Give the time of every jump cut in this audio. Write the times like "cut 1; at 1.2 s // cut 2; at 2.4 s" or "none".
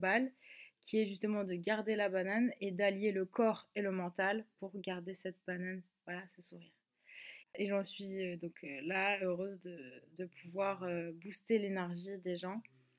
cut 1; at 7.4 s